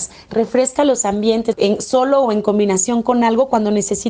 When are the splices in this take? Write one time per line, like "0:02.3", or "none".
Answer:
0:01.5